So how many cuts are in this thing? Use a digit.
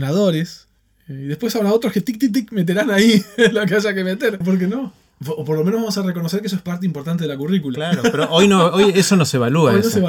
1